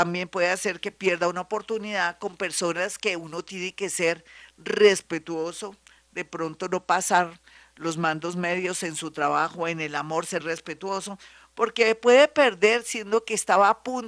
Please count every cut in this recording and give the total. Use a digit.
1